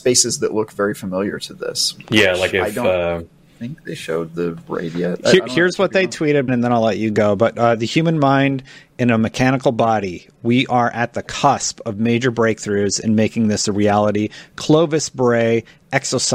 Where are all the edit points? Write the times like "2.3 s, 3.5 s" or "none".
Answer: 6.5 s